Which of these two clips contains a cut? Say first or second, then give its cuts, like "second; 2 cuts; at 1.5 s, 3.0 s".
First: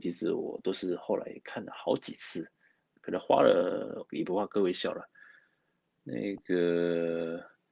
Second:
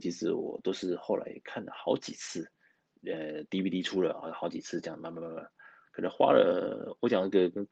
first; 2 cuts; at 3.0 s, 4.1 s